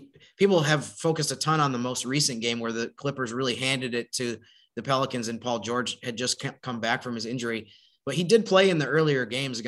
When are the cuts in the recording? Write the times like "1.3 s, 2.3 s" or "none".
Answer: none